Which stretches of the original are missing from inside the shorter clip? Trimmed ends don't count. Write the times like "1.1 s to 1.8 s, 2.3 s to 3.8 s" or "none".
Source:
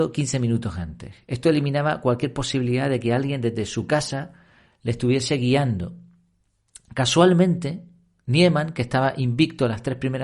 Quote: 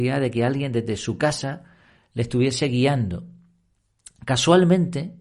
none